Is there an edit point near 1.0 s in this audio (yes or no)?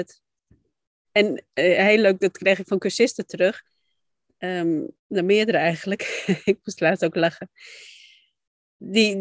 yes